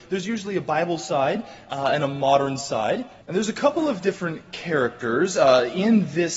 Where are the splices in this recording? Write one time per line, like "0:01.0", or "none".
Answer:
0:03.2